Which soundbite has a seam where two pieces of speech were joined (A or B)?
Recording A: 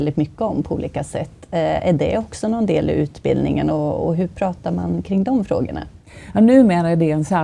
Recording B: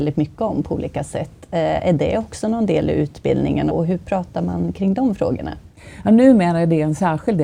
B